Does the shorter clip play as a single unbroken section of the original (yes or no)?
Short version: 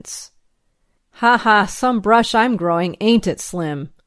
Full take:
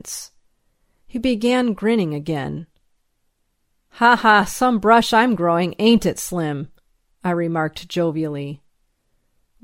no